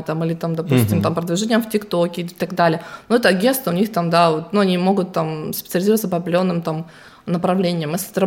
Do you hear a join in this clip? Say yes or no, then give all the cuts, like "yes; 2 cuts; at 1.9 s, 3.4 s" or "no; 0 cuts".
no; 0 cuts